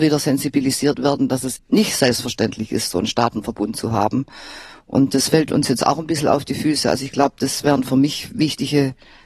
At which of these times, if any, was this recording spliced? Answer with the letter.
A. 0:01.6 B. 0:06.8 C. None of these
A